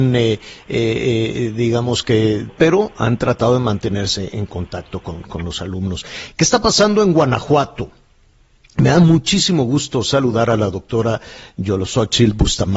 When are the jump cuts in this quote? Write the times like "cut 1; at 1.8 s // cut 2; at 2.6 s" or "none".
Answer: cut 1; at 2.5 s